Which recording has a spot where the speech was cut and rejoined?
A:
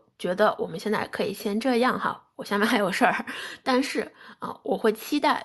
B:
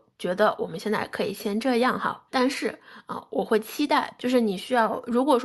B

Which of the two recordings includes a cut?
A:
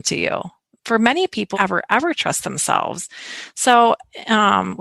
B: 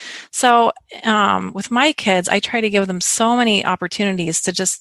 A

